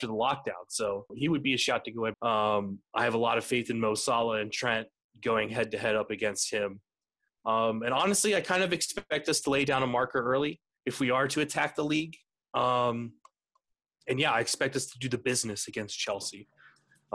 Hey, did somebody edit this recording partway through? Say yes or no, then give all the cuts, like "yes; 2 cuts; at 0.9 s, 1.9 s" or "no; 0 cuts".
yes; 2 cuts; at 1.1 s, 2.1 s